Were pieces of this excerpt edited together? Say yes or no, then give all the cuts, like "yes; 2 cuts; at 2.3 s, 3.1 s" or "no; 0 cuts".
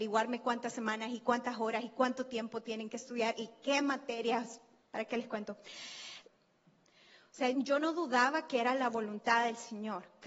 yes; 2 cuts; at 6.2 s, 7.5 s